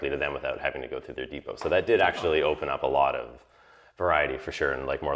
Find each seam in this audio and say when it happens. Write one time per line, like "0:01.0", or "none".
none